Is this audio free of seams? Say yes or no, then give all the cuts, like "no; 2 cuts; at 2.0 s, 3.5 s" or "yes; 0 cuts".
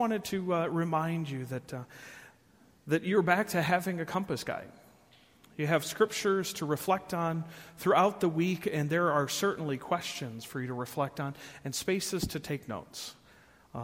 yes; 0 cuts